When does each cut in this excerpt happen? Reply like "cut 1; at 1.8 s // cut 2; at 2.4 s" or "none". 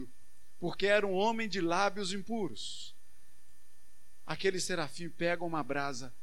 none